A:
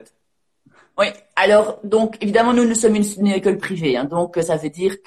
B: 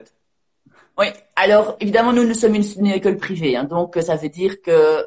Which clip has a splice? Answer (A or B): B